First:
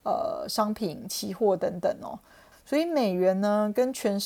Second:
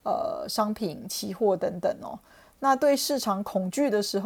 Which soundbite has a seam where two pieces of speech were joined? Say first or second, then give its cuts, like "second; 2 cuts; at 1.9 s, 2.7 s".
first; 1 cut; at 2.5 s